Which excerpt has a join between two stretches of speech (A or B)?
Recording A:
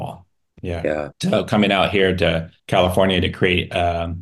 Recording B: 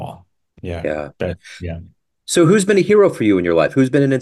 A